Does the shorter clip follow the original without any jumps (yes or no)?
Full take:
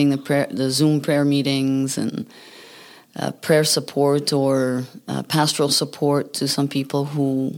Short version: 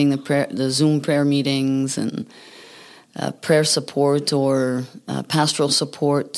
yes